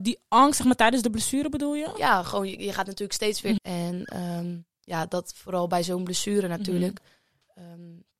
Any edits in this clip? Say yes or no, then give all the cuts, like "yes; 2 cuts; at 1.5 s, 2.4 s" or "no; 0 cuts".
yes; 1 cut; at 3.6 s